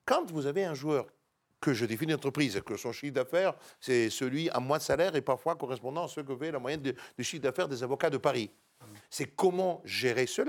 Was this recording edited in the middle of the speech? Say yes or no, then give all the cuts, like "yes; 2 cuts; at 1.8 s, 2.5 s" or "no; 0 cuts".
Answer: yes; 1 cut; at 9.0 s